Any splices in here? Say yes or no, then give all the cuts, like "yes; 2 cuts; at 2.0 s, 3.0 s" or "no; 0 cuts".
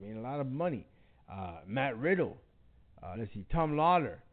no; 0 cuts